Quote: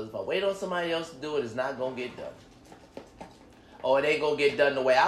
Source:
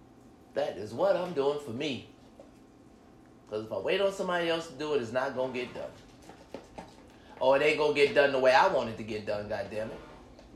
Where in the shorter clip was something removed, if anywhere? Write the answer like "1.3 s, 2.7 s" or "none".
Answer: none